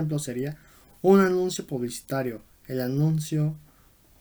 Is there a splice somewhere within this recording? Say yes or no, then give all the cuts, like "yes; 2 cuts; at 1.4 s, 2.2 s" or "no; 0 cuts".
no; 0 cuts